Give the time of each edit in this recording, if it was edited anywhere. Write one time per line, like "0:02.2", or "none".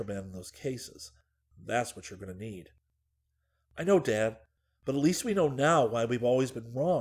none